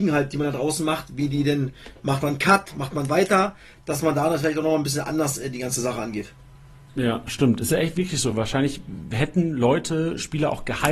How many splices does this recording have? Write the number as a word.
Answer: zero